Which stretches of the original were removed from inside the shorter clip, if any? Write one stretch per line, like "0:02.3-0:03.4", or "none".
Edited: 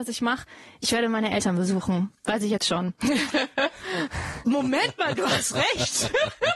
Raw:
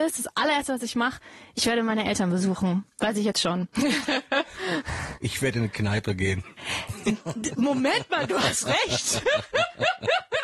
0:05.2-0:07.6